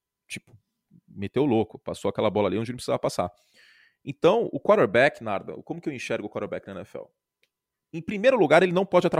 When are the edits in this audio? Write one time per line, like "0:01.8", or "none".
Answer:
none